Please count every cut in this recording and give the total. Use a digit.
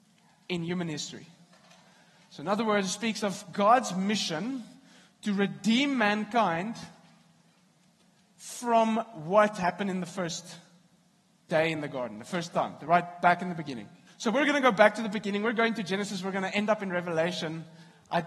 1